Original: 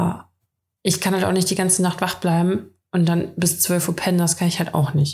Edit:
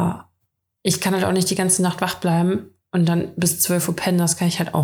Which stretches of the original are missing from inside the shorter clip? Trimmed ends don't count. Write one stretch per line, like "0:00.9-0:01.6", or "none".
none